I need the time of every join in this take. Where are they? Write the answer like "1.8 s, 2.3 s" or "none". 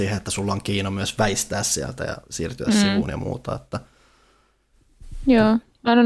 none